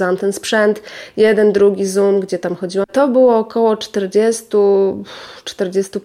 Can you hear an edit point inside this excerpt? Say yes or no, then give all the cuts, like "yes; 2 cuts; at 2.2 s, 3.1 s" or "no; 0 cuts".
yes; 1 cut; at 2.8 s